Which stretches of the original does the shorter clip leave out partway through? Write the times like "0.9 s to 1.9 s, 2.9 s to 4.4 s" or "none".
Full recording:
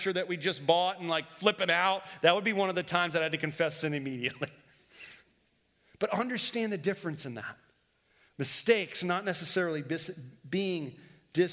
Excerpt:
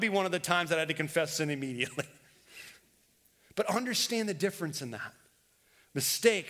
none